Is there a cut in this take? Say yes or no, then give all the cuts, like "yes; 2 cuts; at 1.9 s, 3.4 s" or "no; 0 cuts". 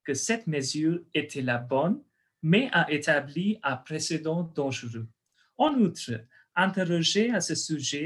no; 0 cuts